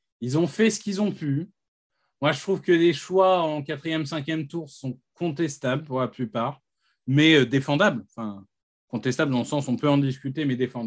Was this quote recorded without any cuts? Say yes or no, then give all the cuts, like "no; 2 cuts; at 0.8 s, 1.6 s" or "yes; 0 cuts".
yes; 0 cuts